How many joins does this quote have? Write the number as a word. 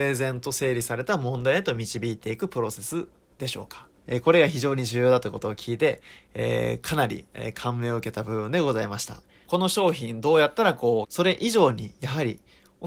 three